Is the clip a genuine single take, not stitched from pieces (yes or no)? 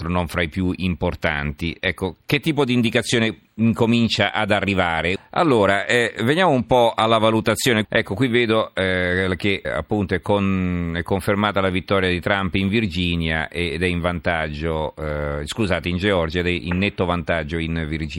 no